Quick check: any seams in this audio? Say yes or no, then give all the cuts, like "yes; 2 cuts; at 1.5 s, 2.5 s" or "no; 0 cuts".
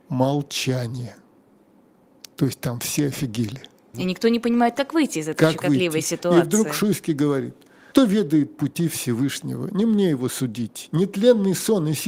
yes; 2 cuts; at 3.9 s, 7.9 s